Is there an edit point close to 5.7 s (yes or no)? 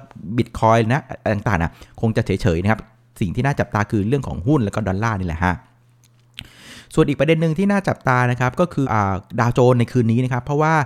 no